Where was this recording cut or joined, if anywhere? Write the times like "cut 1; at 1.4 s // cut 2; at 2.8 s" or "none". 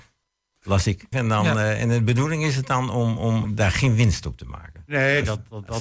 cut 1; at 1.1 s // cut 2; at 3.4 s